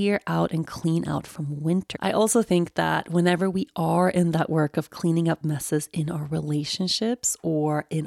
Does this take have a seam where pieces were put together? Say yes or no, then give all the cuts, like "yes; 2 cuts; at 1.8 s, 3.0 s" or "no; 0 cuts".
yes; 1 cut; at 1.9 s